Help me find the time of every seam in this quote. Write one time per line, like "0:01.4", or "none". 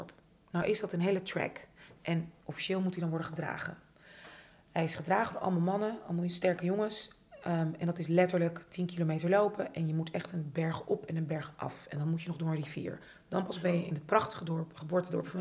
none